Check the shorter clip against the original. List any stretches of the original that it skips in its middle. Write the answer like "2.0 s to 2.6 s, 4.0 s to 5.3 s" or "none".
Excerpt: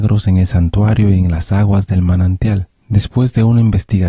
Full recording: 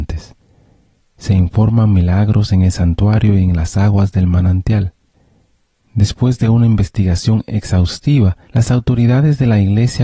5.0 s to 5.8 s